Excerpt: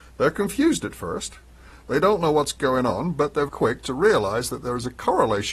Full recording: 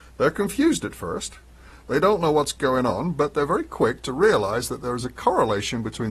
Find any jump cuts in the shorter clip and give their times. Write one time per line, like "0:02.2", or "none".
0:03.5